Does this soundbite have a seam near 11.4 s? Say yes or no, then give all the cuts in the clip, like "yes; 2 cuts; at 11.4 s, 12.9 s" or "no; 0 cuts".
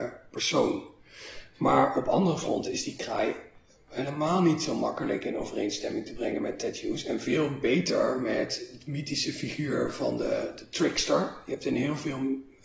no; 1 cut; at 1.5 s